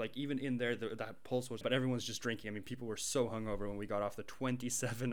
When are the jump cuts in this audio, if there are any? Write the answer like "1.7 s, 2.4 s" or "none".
1.6 s